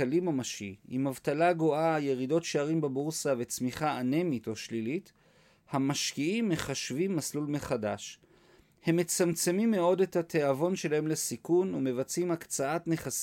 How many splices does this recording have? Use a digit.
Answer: 0